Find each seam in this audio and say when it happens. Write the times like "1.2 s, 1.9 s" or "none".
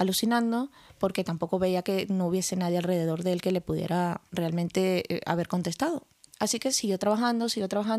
none